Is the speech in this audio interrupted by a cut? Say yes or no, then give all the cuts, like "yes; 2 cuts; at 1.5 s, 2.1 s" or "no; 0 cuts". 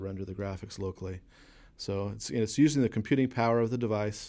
no; 0 cuts